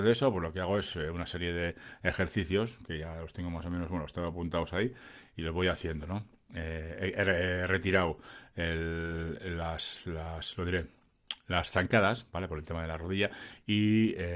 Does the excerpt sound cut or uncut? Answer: uncut